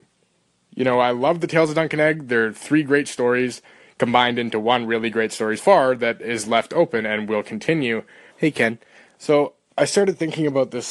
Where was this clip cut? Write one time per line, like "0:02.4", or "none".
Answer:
0:05.6
0:08.3